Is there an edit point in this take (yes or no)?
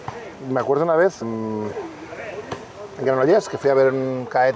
yes